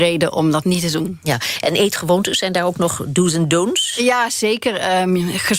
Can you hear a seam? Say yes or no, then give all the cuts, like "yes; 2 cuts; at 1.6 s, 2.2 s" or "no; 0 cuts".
no; 0 cuts